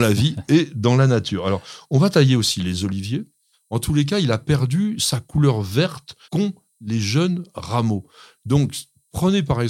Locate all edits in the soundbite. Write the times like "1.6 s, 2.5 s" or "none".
3.5 s, 6.2 s